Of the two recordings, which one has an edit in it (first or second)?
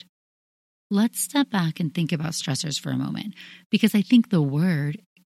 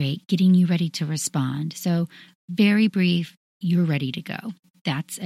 second